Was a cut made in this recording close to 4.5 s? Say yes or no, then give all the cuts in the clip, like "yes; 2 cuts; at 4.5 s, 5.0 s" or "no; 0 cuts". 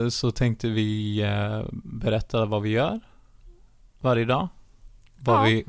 no; 0 cuts